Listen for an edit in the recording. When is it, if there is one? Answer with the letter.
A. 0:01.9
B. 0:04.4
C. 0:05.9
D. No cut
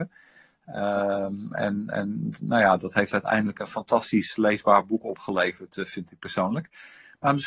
D